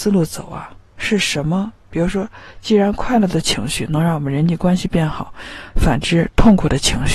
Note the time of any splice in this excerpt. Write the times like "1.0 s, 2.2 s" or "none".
none